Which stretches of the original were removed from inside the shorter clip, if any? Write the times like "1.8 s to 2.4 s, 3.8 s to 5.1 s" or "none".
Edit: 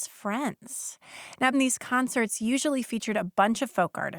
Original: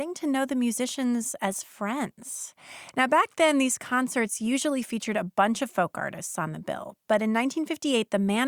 3.1 s to 3.5 s

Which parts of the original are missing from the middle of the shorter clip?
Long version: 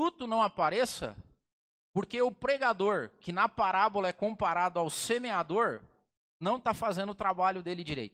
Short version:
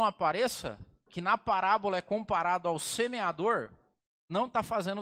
1.4 s to 3.2 s

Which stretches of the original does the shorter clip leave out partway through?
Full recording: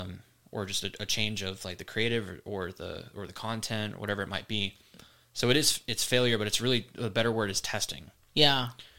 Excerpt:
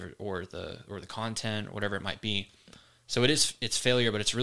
none

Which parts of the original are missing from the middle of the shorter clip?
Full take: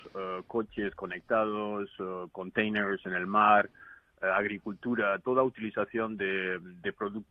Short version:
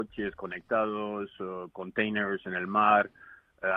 none

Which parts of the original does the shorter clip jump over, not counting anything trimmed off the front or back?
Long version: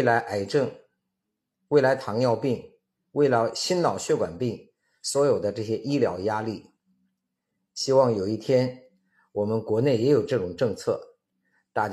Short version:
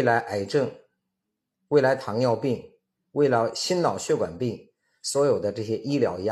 none

